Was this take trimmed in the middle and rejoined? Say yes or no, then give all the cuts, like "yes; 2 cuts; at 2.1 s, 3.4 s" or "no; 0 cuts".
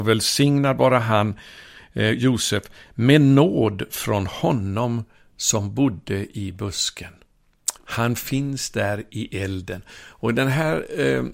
yes; 1 cut; at 7.8 s